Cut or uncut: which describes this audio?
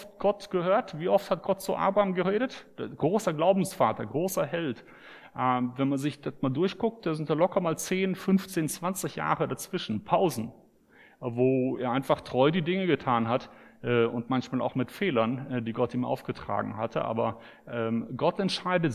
uncut